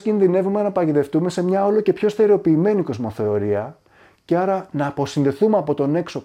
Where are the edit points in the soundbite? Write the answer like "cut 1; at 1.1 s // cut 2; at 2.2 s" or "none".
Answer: none